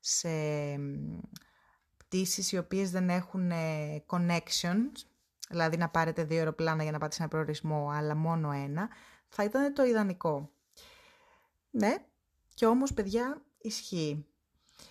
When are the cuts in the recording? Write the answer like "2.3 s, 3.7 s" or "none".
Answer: none